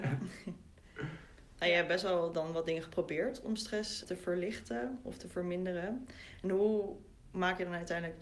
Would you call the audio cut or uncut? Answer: cut